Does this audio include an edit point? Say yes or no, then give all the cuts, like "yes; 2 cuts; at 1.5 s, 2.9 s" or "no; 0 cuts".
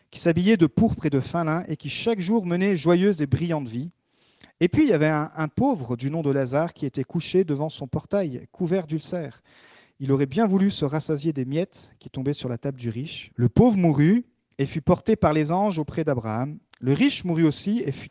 yes; 1 cut; at 13.3 s